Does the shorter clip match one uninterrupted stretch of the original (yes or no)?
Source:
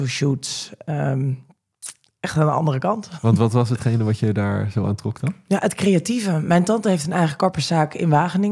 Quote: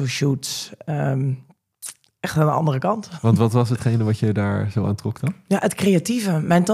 yes